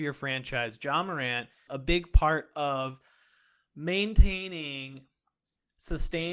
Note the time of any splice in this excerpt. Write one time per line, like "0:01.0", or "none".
0:01.7